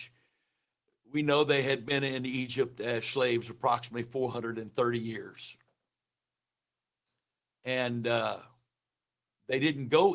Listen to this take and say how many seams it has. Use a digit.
0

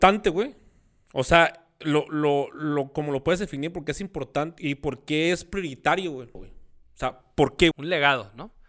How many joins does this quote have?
3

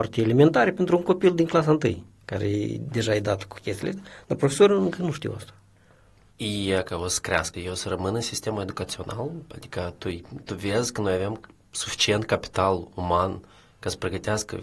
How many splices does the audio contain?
2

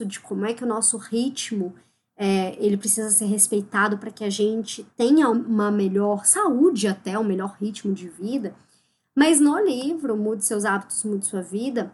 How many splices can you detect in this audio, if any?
1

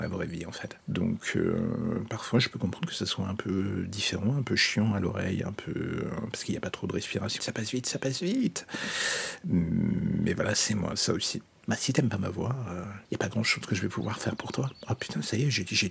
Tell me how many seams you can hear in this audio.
1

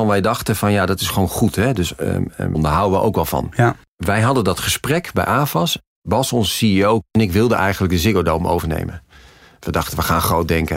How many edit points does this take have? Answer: 1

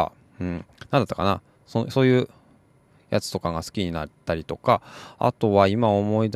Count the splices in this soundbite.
0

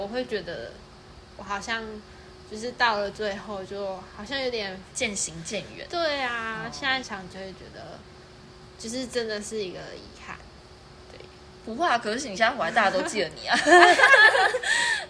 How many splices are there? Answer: 1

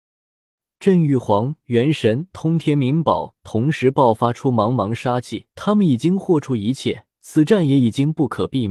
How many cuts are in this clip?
3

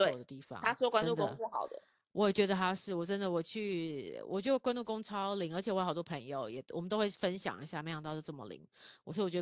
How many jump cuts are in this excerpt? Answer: 0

